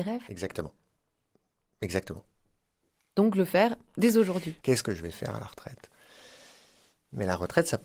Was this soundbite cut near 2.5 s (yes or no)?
no